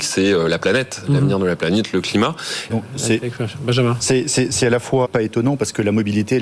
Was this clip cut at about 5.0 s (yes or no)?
yes